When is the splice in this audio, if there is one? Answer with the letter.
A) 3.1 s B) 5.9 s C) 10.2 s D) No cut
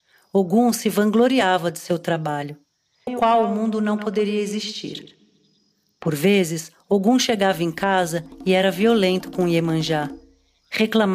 A